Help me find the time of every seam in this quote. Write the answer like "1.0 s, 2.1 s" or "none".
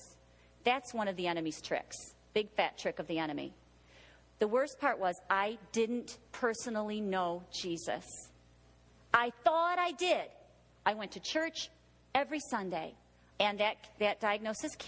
13.3 s